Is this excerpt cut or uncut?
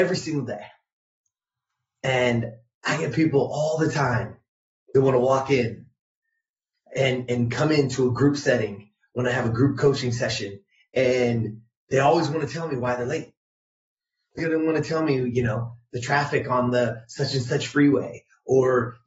cut